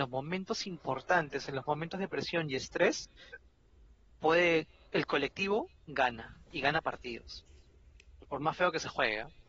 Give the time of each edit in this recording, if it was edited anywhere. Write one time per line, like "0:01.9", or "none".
none